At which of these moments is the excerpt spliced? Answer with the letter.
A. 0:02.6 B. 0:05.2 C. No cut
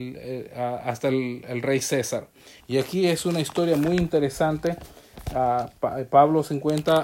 A